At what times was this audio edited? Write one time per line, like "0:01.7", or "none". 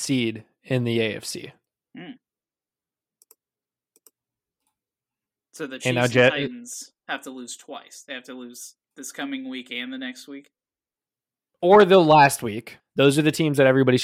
0:08.8
0:12.8

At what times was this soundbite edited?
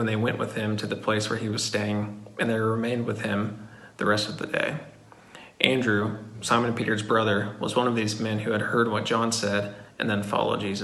none

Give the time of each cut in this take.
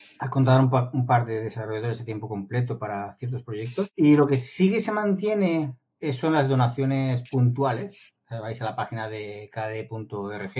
none

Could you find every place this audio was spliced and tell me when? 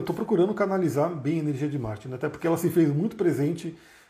none

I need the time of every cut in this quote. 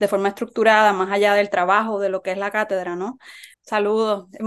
0:03.5

